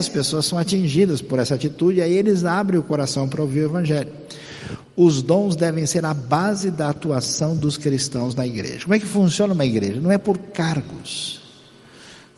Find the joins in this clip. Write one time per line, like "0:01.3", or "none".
none